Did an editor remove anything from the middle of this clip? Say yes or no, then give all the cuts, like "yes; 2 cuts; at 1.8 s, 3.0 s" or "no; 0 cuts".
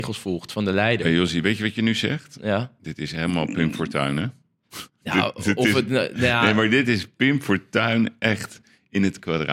no; 0 cuts